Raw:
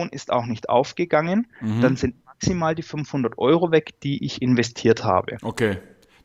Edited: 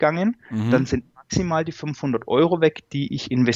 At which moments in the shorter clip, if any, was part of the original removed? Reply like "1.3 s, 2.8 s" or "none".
none